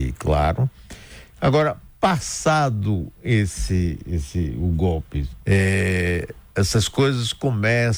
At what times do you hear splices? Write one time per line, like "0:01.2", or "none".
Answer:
0:05.4